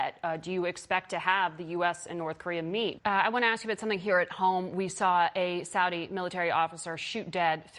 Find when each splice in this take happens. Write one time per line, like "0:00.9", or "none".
0:03.0